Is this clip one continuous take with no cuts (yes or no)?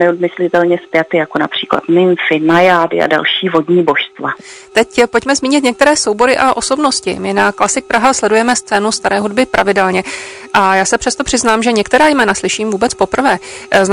no